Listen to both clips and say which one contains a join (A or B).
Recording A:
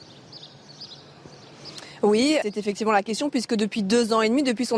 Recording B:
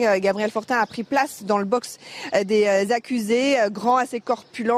A